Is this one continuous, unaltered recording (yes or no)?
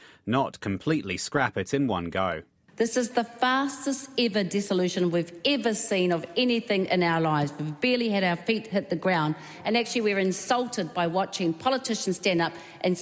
yes